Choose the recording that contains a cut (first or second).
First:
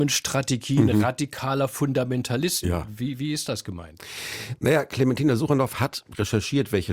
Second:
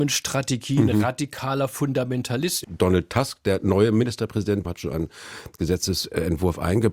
second